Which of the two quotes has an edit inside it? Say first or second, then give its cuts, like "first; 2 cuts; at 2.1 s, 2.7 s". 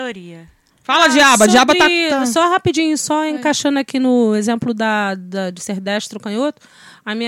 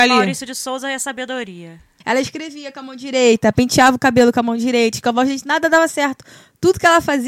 second; 1 cut; at 2.0 s